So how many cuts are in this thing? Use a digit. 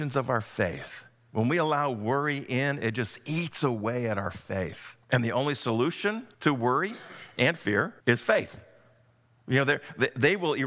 3